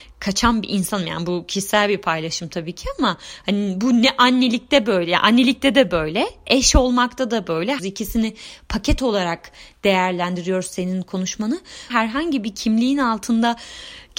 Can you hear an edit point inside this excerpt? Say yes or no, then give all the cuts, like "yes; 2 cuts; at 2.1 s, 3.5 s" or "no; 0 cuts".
yes; 2 cuts; at 7.8 s, 11.9 s